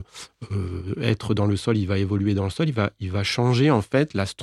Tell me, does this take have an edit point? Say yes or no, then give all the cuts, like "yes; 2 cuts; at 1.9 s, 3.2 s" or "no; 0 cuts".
no; 0 cuts